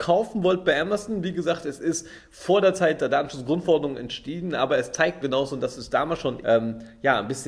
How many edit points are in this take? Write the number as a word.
two